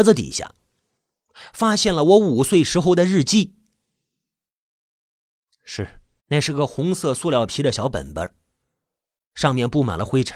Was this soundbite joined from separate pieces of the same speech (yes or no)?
yes